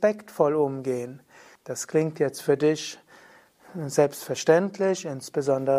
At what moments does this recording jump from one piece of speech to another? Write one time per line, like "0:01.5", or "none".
0:01.6